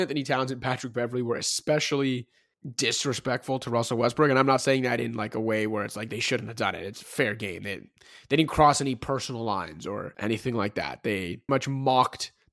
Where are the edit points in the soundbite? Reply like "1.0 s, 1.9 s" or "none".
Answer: 11.5 s